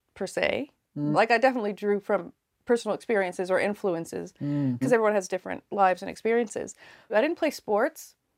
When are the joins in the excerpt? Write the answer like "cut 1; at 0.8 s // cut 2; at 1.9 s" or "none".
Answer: cut 1; at 1.1 s // cut 2; at 4.8 s // cut 3; at 7.1 s